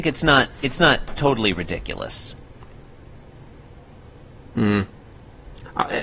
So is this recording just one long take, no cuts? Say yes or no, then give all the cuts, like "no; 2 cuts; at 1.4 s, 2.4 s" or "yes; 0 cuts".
yes; 0 cuts